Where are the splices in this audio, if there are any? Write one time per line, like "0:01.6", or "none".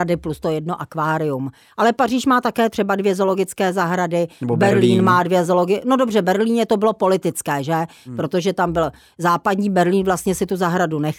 none